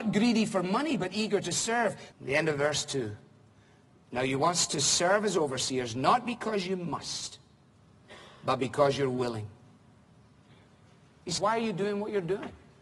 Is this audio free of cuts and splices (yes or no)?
no